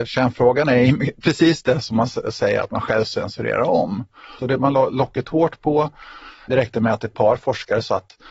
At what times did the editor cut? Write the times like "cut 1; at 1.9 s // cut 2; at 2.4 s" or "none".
cut 1; at 4.4 s // cut 2; at 6.5 s